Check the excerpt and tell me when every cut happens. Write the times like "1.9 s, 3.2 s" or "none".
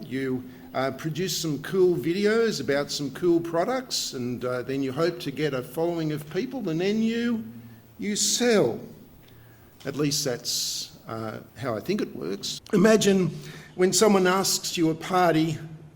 11.5 s, 12.6 s